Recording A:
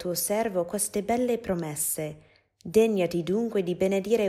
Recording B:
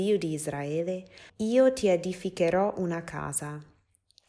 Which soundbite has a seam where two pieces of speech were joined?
B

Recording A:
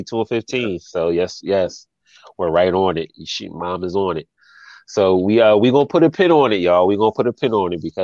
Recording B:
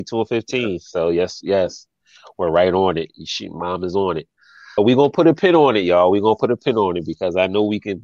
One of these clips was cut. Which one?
B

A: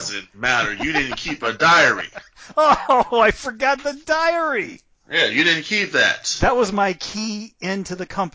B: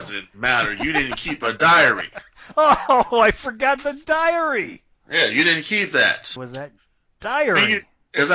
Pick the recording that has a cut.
B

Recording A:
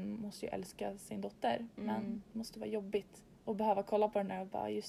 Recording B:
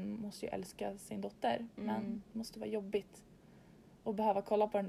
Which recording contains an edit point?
A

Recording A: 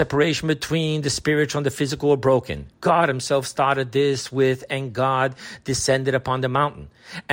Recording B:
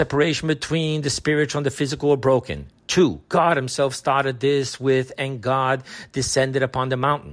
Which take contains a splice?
A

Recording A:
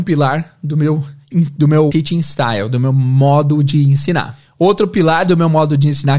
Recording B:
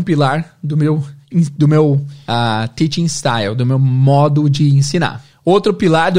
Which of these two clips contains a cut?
A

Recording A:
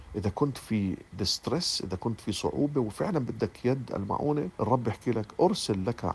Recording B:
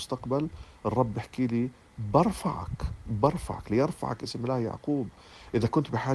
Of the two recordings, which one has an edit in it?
A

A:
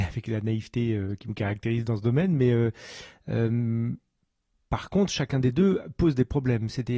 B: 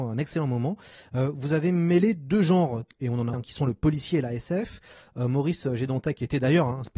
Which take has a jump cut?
B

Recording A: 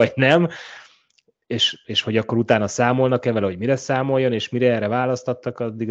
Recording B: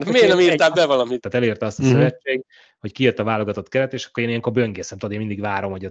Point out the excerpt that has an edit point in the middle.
B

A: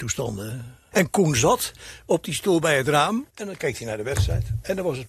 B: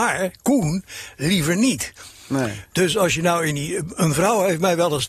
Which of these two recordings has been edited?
A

